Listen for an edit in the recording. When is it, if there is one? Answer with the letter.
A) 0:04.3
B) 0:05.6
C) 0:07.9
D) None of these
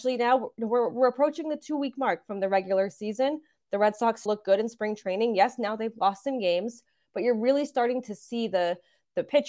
A